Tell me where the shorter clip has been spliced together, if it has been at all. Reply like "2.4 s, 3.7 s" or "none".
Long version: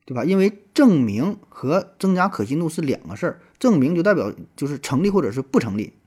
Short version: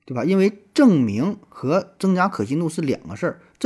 none